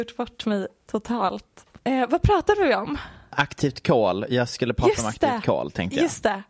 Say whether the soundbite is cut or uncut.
uncut